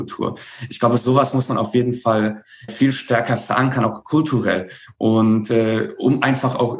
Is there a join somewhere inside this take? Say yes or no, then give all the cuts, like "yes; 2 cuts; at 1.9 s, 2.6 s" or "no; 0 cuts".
yes; 1 cut; at 2.7 s